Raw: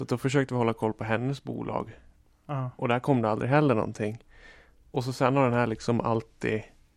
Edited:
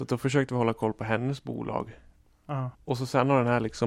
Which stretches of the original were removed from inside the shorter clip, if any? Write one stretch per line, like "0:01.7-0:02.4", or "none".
0:02.7-0:04.8

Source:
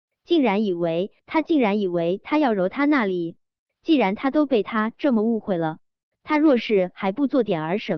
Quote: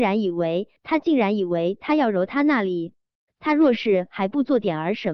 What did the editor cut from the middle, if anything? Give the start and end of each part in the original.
0:03.7-0:06.1

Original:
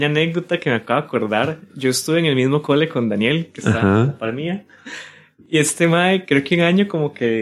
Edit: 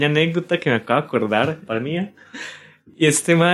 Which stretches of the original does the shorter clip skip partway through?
0:01.7-0:04.2

